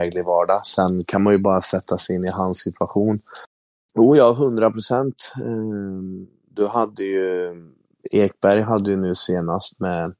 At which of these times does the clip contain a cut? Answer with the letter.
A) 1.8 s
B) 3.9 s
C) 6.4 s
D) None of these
B